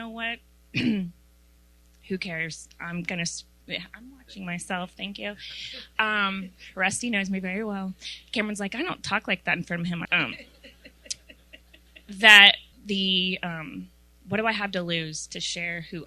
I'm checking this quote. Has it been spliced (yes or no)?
yes